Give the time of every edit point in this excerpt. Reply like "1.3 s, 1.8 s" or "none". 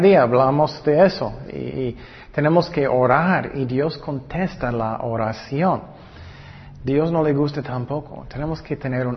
1.5 s, 6.8 s